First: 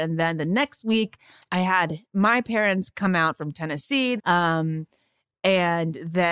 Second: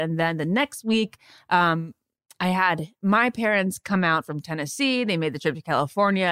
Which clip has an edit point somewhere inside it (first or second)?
first